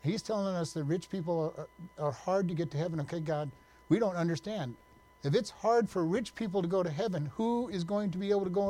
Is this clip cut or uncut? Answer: uncut